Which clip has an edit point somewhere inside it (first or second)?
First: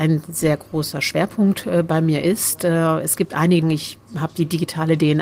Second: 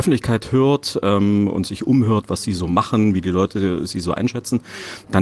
first